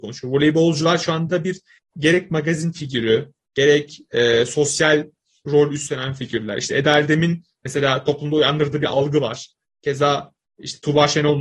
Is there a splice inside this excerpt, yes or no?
no